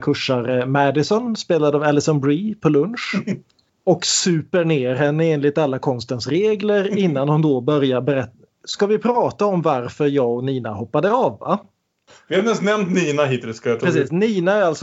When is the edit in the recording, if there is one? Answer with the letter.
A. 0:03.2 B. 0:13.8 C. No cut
B